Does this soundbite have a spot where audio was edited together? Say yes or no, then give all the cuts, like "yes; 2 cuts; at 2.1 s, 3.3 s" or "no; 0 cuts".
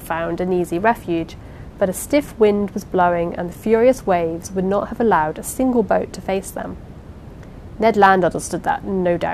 no; 0 cuts